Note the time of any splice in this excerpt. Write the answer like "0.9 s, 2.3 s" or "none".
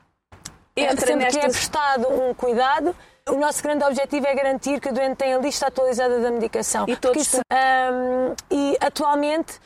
3.3 s, 7.4 s